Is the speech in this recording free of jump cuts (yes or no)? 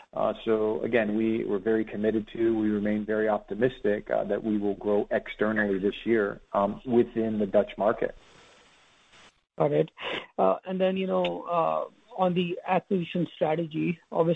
yes